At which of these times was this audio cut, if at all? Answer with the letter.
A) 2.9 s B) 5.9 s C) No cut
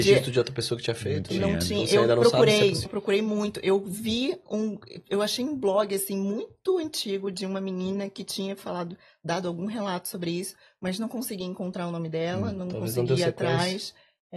A